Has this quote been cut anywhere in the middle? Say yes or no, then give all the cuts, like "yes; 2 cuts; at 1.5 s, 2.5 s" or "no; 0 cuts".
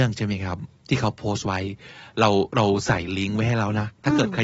no; 0 cuts